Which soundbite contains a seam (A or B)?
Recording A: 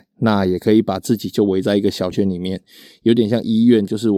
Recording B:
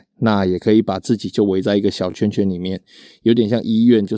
A